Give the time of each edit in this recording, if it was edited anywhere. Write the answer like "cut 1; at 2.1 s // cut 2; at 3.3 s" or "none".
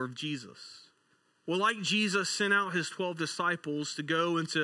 cut 1; at 1.5 s